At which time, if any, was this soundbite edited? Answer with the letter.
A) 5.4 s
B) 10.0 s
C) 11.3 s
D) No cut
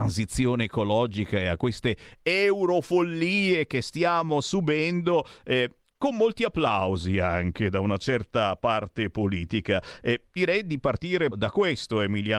C